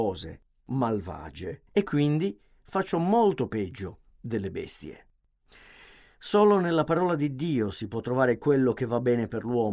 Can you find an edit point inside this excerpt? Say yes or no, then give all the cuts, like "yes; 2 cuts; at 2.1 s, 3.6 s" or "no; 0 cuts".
yes; 1 cut; at 1.7 s